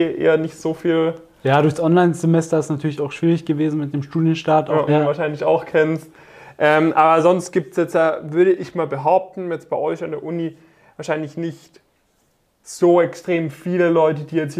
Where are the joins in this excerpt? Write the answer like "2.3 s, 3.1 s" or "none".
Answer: 4.9 s